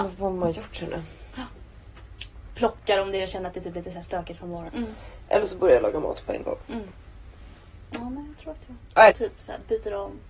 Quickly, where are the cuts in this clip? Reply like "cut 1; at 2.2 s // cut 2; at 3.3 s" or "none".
cut 1; at 4.7 s // cut 2; at 9.1 s